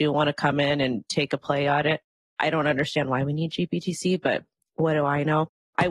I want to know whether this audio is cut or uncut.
uncut